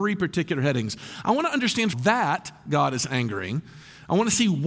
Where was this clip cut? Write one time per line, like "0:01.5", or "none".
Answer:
0:01.9